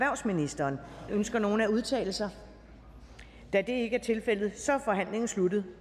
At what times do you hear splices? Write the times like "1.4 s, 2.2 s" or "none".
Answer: 1.1 s